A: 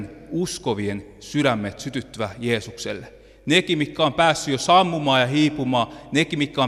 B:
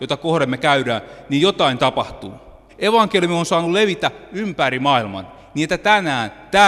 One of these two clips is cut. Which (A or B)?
B